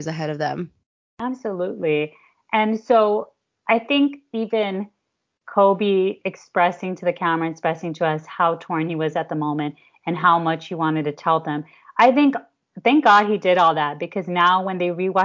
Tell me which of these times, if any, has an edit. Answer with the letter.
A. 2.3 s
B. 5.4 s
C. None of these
C